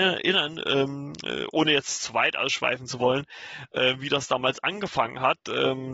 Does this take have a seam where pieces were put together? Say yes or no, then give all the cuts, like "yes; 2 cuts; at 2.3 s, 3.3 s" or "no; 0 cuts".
no; 0 cuts